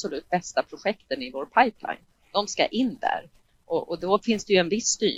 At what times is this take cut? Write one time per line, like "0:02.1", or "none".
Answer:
none